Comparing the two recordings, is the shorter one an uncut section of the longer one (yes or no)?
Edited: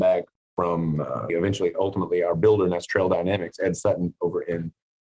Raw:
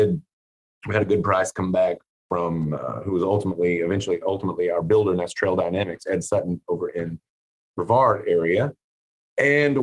no